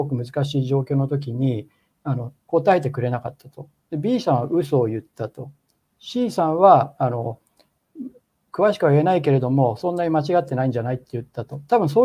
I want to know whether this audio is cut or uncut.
uncut